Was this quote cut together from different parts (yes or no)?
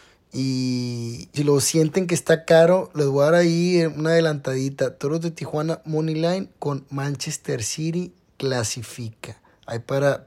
yes